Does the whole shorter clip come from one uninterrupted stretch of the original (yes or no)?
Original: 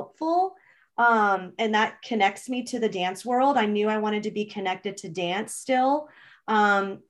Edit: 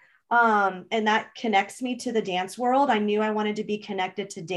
yes